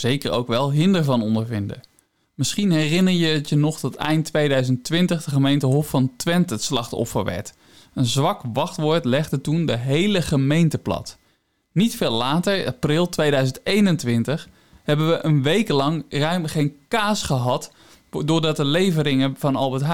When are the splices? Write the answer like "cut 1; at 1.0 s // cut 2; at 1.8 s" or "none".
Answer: none